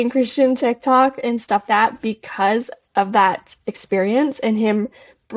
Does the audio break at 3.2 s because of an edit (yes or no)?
no